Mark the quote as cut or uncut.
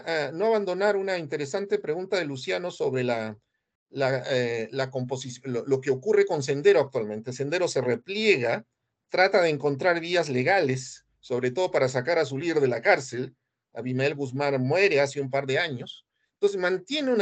uncut